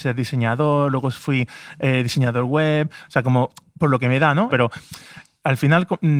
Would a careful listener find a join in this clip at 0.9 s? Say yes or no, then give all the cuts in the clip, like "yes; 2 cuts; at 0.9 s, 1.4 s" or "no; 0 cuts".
no; 1 cut; at 4.5 s